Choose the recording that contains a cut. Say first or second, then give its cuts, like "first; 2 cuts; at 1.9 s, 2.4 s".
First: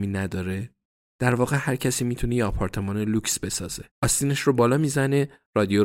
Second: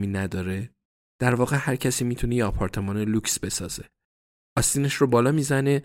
first; 1 cut; at 3.9 s